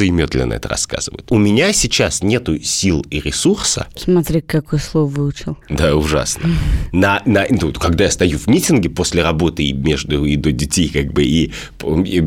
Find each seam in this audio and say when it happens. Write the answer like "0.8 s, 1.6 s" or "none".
5.6 s